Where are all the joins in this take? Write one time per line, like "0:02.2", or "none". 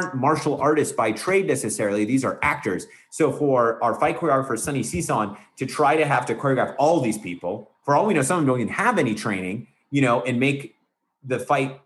none

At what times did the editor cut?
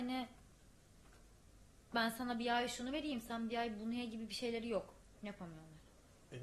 0:05.2

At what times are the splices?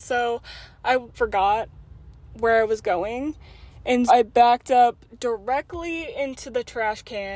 0:01.1
0:04.1

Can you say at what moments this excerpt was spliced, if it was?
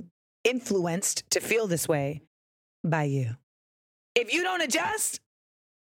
none

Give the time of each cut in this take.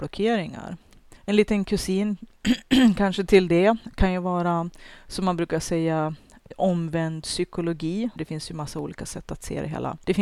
0:01.2
0:08.2

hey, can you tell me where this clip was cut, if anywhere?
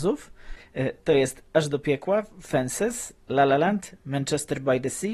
0:04.0

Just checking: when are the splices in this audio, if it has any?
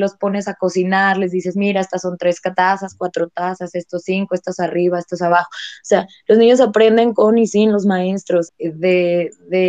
0:08.5

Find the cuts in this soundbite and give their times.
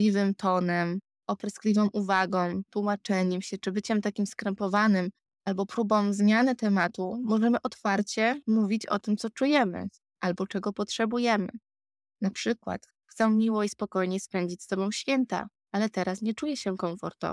none

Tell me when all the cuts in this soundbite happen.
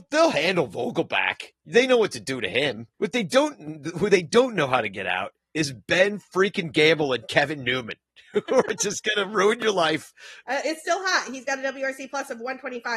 0:02.9
0:10.4

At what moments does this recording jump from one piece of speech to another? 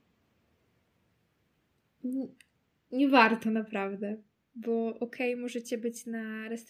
none

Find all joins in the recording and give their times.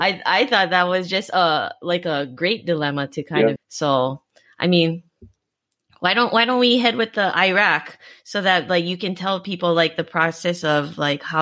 0:03.6

